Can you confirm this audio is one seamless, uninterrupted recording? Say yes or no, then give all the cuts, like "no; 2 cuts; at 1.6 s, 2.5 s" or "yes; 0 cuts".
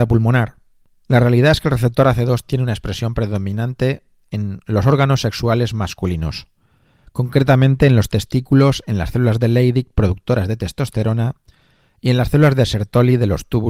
yes; 0 cuts